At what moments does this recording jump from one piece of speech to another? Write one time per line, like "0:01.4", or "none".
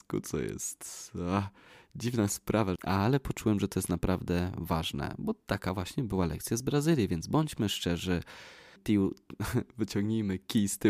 0:02.8
0:08.8